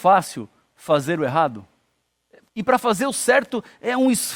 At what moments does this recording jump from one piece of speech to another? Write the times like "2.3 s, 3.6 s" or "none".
2.5 s

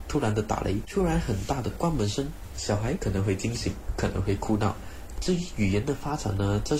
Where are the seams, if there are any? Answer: 5.2 s

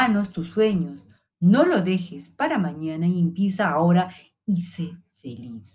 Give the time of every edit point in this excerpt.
none

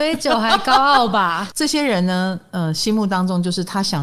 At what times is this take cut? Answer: 1.5 s

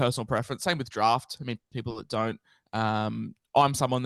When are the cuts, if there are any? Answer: 1.7 s

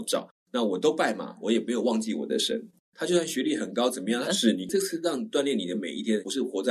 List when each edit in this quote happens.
2.8 s, 4.2 s

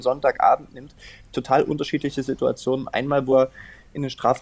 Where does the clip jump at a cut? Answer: none

